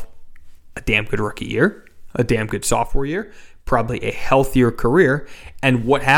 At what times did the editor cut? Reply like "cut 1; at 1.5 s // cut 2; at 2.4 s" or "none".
none